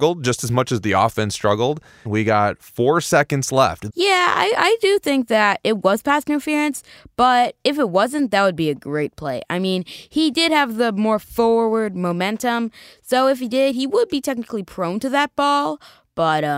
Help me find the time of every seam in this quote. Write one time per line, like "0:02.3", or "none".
0:02.1
0:03.9